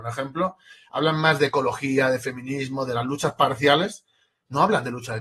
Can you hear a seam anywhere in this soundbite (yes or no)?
no